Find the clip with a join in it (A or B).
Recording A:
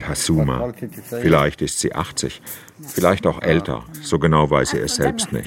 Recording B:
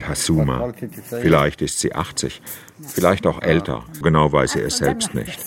B